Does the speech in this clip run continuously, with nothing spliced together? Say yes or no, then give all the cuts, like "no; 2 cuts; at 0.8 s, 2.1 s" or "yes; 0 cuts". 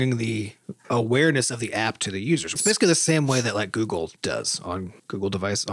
no; 1 cut; at 2.6 s